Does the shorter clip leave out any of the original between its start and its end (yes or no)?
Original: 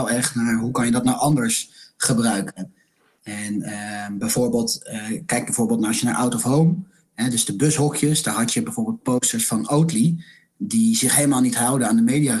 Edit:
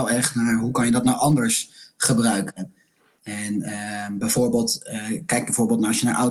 no